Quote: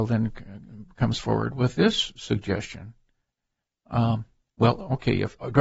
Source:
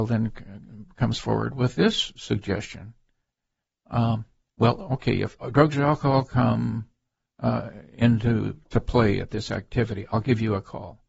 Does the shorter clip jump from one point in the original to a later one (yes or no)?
no